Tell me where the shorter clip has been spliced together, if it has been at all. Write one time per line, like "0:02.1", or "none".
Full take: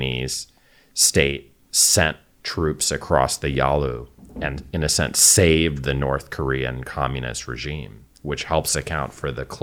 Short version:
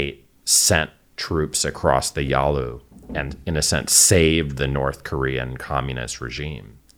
none